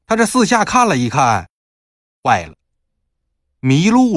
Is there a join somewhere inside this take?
no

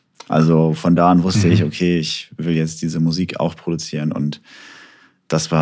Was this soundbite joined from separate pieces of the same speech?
no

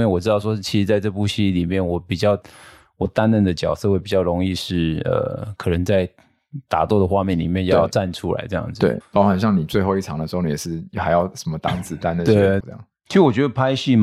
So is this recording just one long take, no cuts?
no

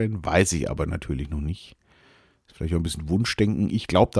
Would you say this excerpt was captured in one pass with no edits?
yes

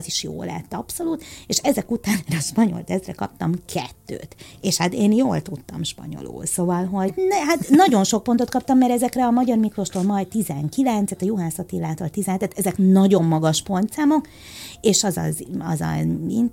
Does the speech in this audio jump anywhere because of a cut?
yes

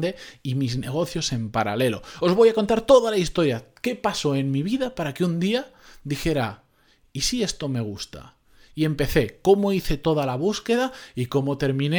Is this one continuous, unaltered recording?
yes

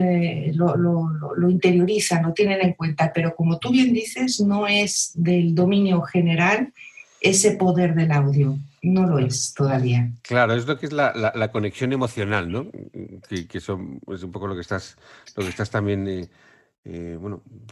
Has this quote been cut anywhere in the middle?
no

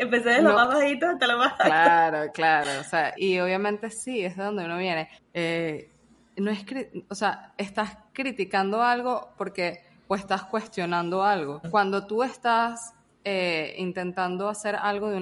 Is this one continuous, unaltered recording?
no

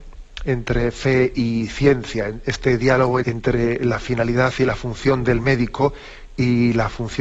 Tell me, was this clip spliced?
yes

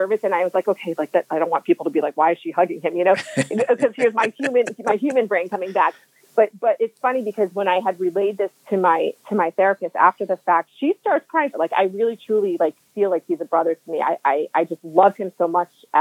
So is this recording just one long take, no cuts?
no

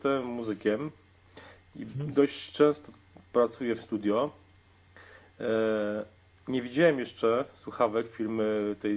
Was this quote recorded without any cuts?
yes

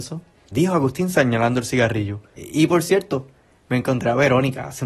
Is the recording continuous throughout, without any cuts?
no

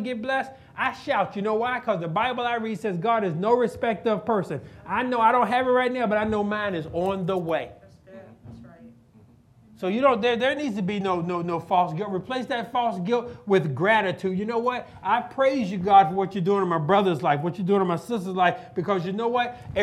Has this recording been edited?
no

